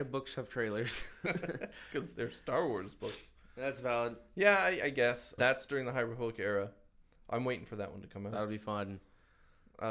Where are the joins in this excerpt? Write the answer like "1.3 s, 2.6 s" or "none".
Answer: 5.4 s